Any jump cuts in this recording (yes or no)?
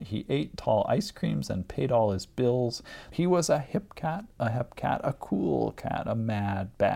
yes